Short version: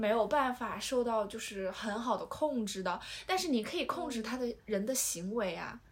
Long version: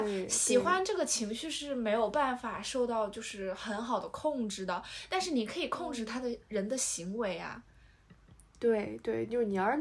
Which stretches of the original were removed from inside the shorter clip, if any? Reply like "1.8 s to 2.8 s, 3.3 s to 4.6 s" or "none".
none